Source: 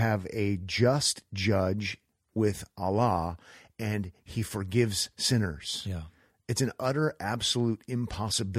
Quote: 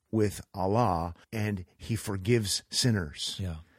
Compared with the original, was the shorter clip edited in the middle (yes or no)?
yes